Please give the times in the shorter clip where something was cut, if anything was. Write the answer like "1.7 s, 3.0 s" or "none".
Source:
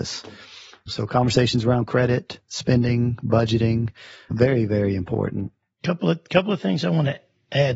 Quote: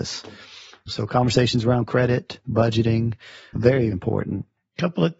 2.4 s, 3.9 s